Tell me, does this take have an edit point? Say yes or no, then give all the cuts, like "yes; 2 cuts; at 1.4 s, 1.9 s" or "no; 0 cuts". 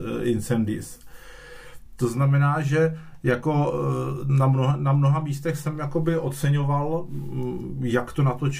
no; 0 cuts